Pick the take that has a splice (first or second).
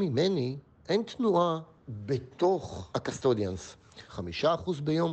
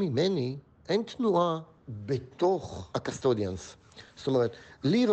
first